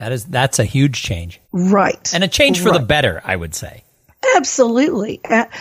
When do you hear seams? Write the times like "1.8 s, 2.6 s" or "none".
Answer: 1.4 s